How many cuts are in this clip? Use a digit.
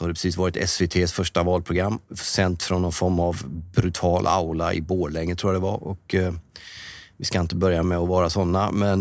0